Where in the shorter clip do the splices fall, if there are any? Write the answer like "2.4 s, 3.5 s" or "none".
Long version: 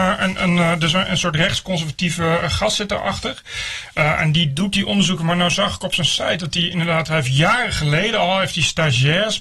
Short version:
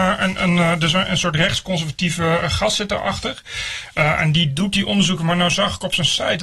none